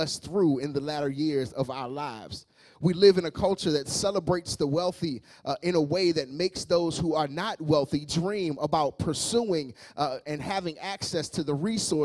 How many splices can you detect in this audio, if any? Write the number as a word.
one